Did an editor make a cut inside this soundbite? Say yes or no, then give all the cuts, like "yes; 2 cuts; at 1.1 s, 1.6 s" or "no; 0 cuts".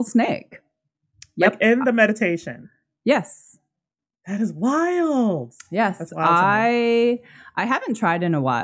no; 0 cuts